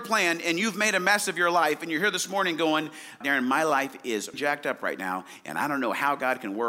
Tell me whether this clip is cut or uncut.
cut